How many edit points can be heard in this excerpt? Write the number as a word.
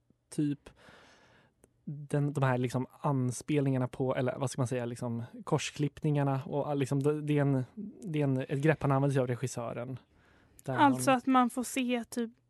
zero